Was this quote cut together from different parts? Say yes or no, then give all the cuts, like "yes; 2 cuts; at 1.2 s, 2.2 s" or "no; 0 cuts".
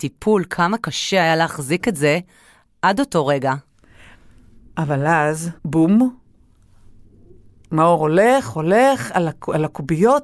yes; 1 cut; at 5.6 s